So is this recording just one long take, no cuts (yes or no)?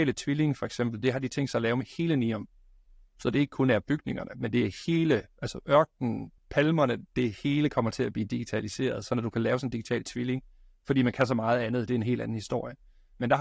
no